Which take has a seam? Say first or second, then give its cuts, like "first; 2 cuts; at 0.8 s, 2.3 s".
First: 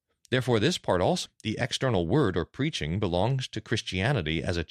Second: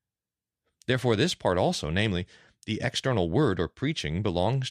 first; 1 cut; at 1.3 s